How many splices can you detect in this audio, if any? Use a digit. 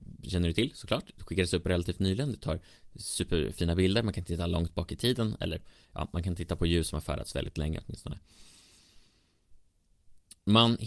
0